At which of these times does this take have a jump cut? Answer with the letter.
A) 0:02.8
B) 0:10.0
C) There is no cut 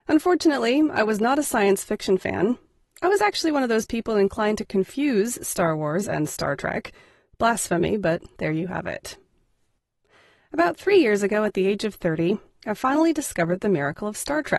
A